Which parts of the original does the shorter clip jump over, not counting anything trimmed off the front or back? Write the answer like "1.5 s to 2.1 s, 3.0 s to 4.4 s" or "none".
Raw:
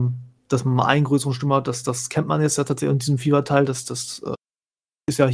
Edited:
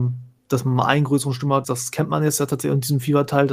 1.6 s to 1.8 s